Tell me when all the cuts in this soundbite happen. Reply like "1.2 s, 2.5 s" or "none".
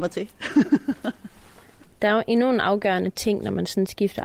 none